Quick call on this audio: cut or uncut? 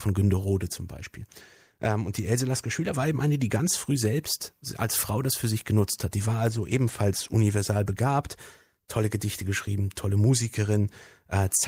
uncut